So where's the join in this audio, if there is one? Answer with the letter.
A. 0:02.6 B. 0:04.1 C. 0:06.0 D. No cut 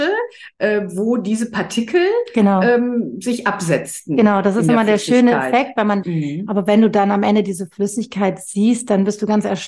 C